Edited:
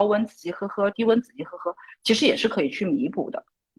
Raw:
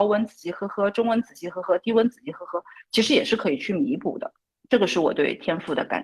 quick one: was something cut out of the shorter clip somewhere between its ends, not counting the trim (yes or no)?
yes